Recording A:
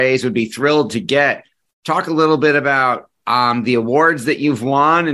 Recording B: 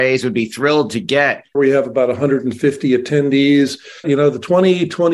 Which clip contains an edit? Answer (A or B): B